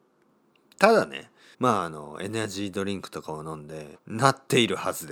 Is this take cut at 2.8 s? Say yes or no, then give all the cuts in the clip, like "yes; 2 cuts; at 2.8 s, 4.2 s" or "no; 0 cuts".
no; 2 cuts; at 1.5 s, 4.0 s